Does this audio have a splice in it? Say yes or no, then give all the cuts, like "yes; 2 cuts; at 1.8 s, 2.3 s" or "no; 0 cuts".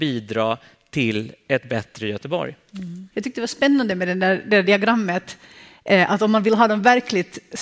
yes; 1 cut; at 3.1 s